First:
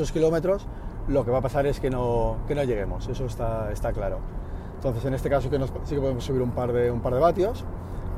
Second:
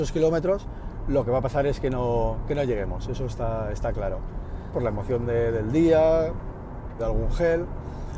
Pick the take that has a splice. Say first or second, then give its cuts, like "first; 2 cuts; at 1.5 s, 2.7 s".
second; 2 cuts; at 4.7 s, 7.0 s